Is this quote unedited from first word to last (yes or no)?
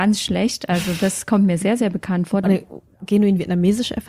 no